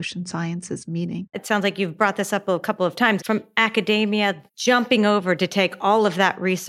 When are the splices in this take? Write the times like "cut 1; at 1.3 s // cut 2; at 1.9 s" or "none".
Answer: cut 1; at 1.3 s // cut 2; at 3.2 s // cut 3; at 4.5 s